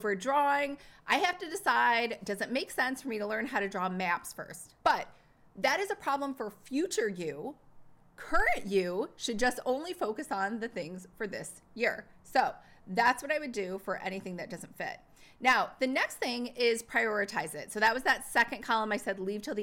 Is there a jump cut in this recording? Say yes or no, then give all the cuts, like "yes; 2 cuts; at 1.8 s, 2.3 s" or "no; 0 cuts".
yes; 1 cut; at 4.8 s